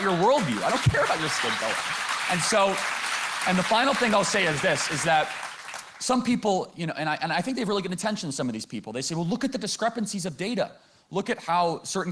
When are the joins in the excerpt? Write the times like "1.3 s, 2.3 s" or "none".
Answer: none